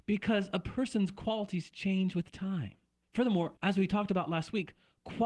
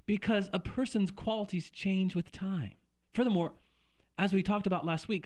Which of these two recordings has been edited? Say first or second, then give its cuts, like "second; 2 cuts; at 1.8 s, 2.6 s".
first; 1 cut; at 3.6 s